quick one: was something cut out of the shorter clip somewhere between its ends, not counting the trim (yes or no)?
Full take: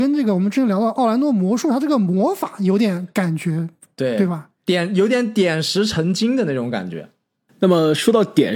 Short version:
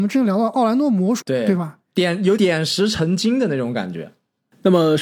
yes